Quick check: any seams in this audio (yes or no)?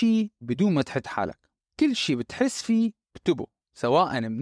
no